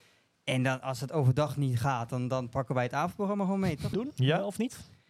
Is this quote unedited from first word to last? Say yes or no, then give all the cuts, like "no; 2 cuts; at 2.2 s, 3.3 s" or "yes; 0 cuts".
no; 1 cut; at 3.9 s